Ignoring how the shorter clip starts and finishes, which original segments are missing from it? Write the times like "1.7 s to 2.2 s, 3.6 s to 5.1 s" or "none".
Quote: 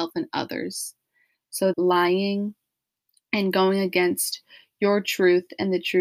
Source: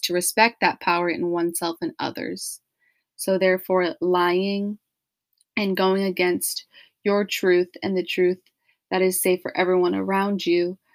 3.4 s to 4.0 s